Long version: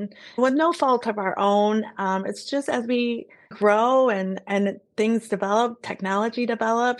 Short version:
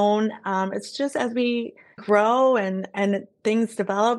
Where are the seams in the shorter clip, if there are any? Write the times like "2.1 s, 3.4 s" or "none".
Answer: none